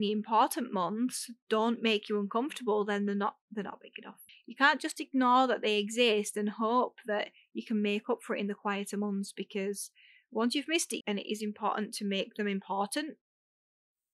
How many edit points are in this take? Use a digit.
2